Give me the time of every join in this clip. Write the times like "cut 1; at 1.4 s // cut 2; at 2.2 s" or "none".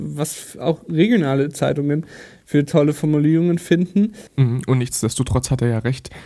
cut 1; at 4.3 s